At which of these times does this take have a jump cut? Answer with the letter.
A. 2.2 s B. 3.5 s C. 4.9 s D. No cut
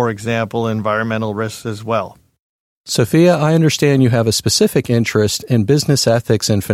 D